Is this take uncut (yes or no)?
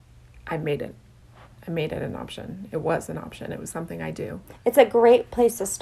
yes